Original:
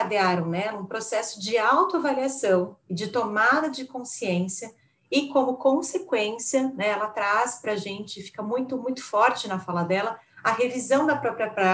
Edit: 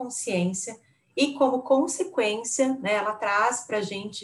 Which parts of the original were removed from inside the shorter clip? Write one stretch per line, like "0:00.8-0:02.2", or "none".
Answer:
none